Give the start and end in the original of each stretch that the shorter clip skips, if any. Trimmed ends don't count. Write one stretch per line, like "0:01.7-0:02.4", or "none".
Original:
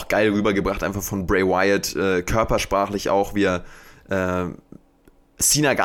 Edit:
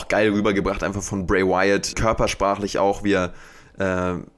0:01.9-0:02.2

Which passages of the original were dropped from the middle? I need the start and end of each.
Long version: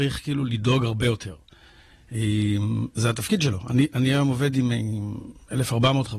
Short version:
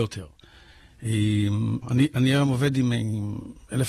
0:02.9-0:03.6

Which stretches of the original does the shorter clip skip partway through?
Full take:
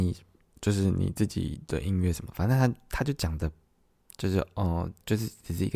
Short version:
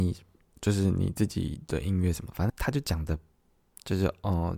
0:02.5-0:02.8

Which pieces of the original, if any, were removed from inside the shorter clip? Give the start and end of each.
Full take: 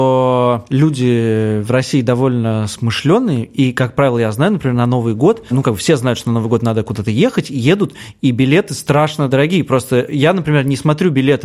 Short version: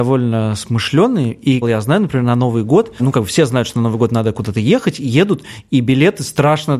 0:03.7-0:04.1

